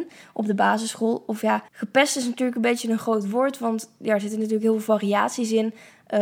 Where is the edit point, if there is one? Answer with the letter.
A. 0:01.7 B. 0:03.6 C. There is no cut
A